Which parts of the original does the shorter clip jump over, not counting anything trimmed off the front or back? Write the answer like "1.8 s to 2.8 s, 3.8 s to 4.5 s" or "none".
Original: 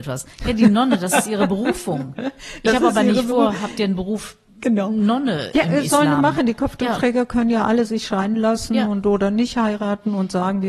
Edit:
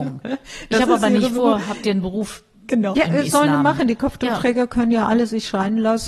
4.9 s to 5.5 s